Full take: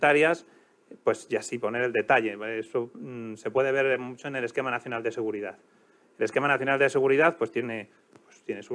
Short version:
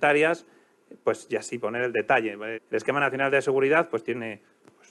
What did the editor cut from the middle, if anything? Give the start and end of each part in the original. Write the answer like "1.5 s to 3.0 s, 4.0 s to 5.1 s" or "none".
2.5 s to 6.0 s